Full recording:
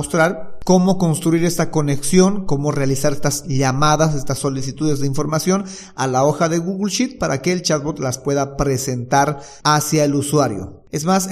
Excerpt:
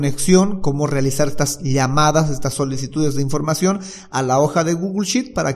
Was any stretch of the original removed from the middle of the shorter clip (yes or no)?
no